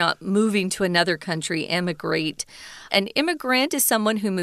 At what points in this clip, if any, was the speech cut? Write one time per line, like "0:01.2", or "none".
0:02.9